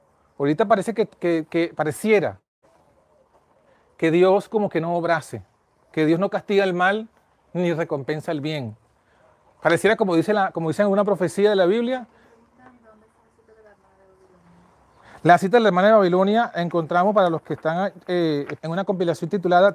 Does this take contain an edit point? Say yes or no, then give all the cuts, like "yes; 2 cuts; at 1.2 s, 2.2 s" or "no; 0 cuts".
yes; 1 cut; at 18.6 s